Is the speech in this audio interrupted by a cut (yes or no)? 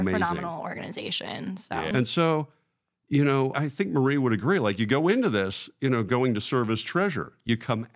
yes